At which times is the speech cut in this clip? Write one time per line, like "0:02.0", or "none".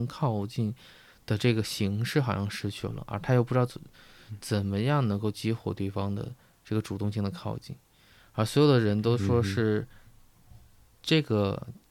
none